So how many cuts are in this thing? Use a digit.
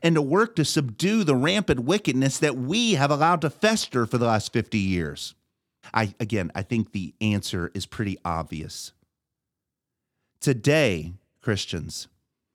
1